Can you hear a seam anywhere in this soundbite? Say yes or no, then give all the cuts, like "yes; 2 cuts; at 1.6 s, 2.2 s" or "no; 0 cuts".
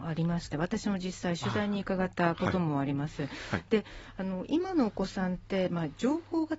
no; 0 cuts